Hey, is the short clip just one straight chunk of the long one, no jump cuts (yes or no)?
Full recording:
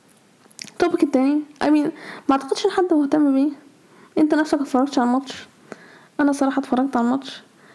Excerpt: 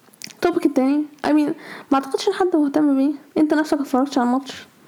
no